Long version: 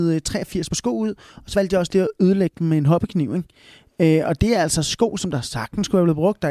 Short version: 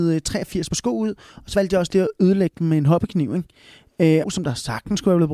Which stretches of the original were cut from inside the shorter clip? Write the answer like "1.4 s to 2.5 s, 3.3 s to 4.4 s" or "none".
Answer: 4.2 s to 5.1 s